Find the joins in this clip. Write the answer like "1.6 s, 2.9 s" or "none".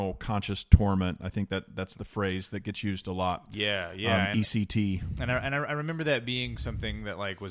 none